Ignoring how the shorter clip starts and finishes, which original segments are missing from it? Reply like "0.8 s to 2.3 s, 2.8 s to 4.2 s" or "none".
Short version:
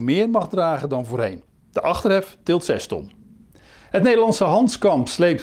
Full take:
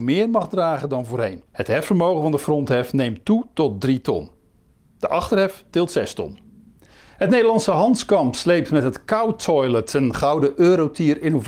1.5 s to 4.8 s